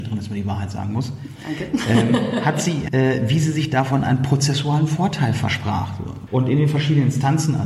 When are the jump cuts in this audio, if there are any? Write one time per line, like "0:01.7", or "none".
0:02.9
0:06.3